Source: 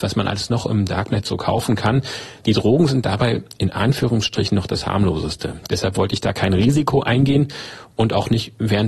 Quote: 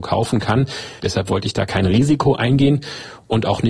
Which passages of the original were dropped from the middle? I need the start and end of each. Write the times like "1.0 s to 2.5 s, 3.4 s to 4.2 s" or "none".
2.4 s to 5.7 s